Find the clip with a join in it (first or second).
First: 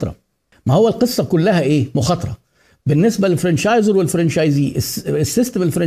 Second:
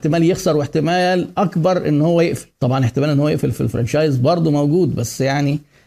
second